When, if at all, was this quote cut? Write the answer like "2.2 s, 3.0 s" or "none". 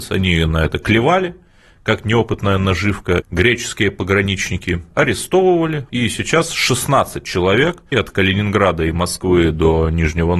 3.2 s, 5.9 s, 7.9 s